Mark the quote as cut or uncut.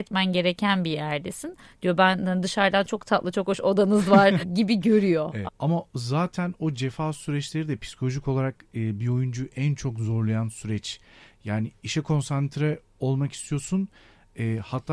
cut